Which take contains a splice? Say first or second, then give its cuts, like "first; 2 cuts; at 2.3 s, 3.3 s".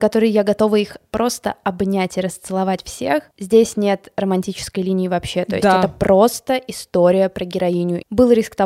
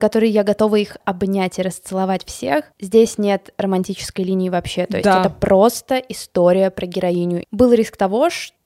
second; 1 cut; at 1.0 s